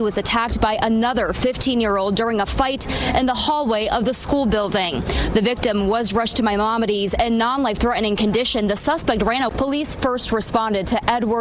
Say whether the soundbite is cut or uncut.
cut